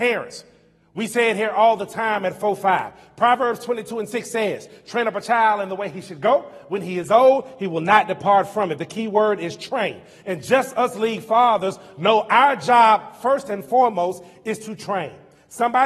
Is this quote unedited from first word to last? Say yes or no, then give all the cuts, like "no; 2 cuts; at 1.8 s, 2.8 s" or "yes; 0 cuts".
yes; 0 cuts